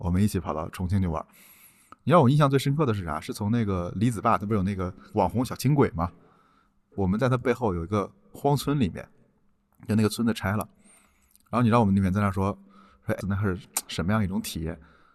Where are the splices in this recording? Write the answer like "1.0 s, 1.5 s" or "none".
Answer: 13.2 s